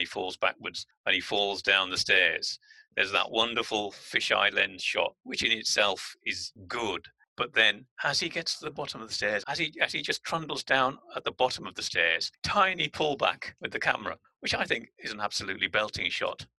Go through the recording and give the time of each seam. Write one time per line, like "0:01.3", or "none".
0:09.4
0:12.4